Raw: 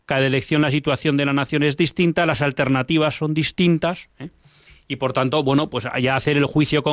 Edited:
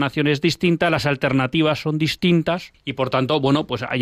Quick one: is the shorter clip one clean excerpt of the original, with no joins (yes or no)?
no